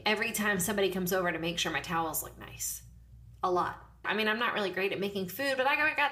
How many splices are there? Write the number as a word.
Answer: one